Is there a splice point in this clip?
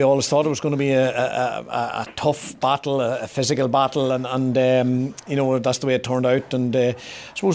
no; 0 cuts

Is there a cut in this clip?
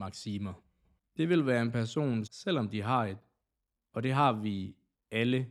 yes; 2 cuts; at 1.0 s, 2.3 s

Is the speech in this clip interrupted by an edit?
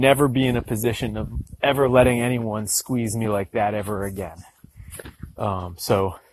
no; 0 cuts

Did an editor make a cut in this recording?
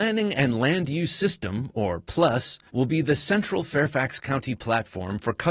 yes; 1 cut; at 2.7 s

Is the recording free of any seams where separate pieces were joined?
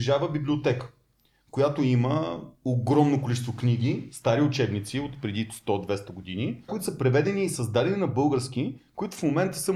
no; 1 cut; at 6.7 s

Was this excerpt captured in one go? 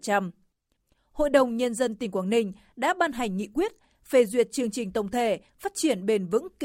yes; 0 cuts

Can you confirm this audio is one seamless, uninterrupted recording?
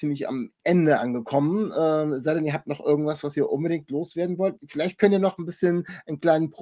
yes; 0 cuts

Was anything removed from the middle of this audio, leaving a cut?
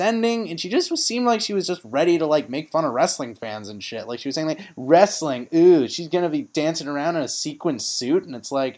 no; 0 cuts

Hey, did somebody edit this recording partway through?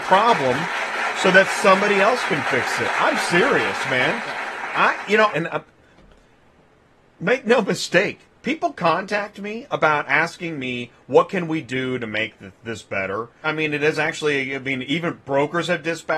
yes; 2 cuts; at 5.3 s, 13.4 s

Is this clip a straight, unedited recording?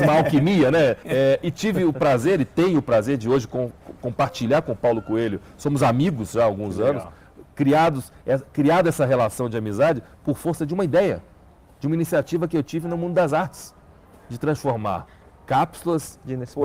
no; 1 cut; at 1.0 s

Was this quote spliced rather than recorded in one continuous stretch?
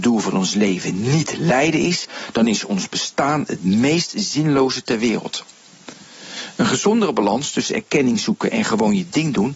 no; 0 cuts

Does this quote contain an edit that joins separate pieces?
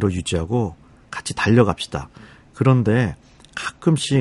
no; 0 cuts

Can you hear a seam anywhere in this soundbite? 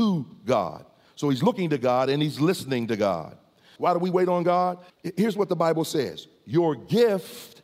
yes; 2 cuts; at 3.8 s, 4.9 s

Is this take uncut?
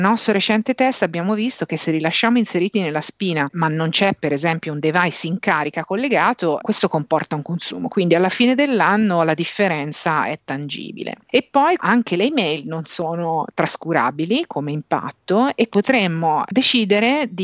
no; 2 cuts; at 11.8 s, 15.7 s

